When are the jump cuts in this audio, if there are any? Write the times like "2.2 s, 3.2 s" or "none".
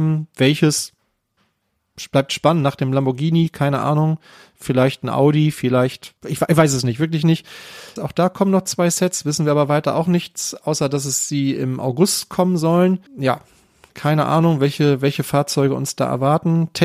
6.2 s, 8.0 s, 13.1 s

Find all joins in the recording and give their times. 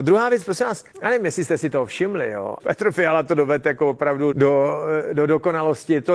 0.9 s, 2.6 s, 4.3 s

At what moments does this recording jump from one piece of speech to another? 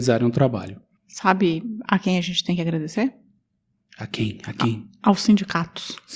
none

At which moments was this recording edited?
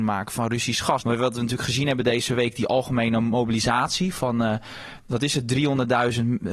1.0 s

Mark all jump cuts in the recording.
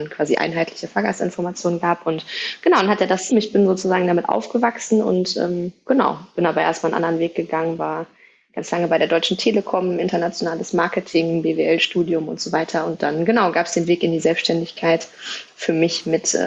3.3 s

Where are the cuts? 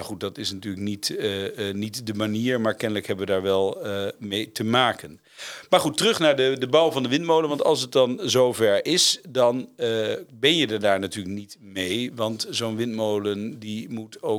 none

